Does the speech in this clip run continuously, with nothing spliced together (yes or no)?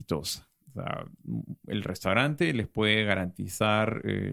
yes